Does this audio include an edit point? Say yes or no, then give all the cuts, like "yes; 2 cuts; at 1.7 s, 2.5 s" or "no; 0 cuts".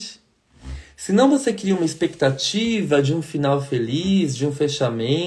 no; 0 cuts